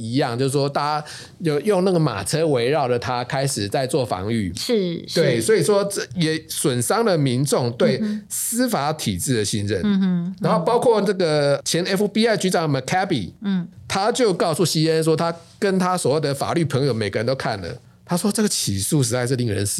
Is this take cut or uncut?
cut